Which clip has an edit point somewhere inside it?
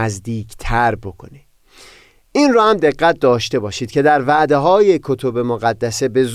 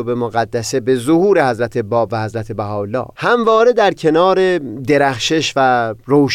second; 1 cut; at 3.1 s

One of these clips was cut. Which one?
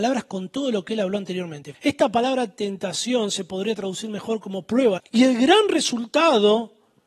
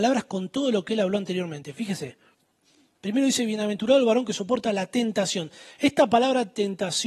first; 2 cuts; at 1.7 s, 5.0 s

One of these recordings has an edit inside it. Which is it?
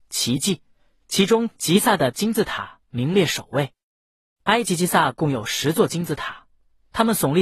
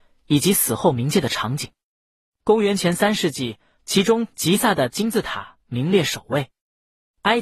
second; 2 cuts; at 2.3 s, 3.8 s

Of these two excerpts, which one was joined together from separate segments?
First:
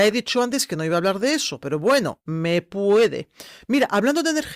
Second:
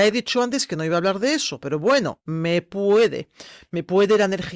first; 1 cut; at 3.6 s

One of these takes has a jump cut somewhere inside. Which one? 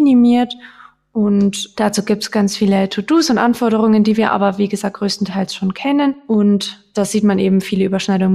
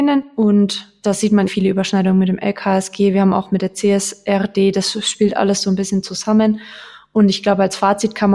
second; 1 cut; at 1.5 s

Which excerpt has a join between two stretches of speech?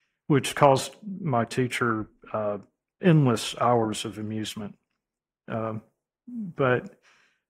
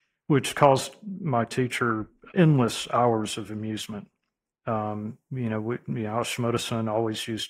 second; 2 cuts; at 2.3 s, 4.5 s

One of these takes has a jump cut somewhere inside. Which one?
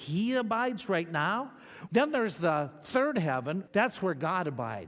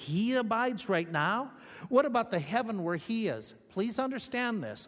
first; 2 cuts; at 1.9 s, 3.7 s

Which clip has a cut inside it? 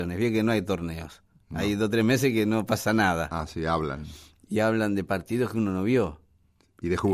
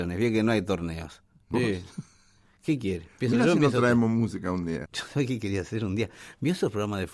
second; 2 cuts; at 1.5 s, 4.9 s

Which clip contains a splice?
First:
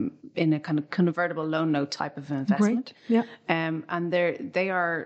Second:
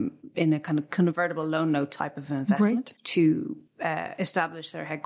second; 1 cut; at 2.9 s

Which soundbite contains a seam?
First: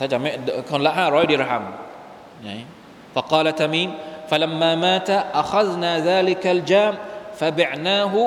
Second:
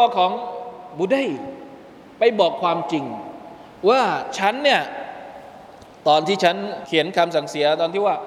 second; 1 cut; at 6.9 s

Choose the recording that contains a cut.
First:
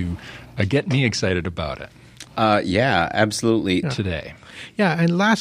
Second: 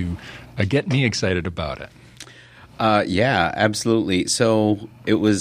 first; 2 cuts; at 2.3 s, 3.8 s

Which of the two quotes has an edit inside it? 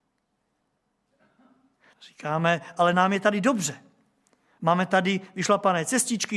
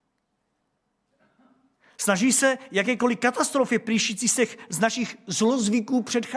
first; 1 cut; at 1.9 s

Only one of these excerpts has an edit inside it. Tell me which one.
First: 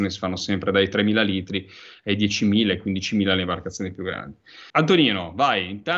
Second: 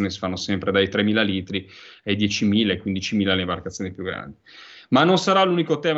first; 1 cut; at 4.7 s

